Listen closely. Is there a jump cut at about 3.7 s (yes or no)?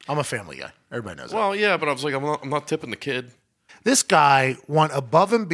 yes